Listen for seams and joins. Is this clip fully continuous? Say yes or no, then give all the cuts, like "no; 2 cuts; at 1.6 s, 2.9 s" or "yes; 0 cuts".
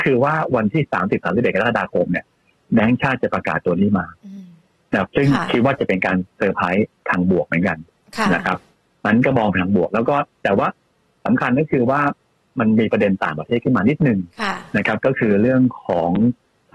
yes; 0 cuts